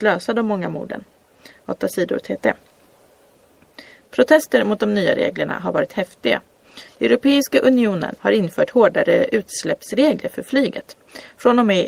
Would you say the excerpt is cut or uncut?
cut